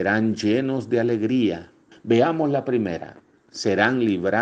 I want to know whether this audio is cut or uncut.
cut